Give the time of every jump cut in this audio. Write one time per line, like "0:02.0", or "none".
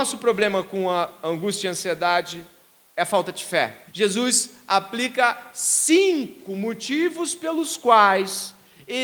0:03.9